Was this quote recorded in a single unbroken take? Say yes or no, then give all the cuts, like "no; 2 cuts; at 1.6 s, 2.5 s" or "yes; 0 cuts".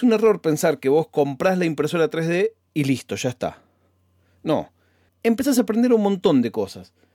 no; 1 cut; at 5.1 s